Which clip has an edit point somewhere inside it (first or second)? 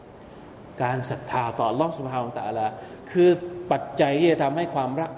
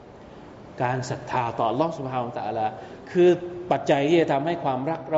second